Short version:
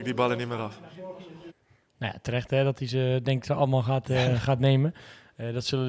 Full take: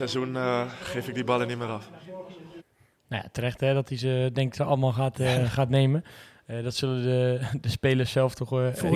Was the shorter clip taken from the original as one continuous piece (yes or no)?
yes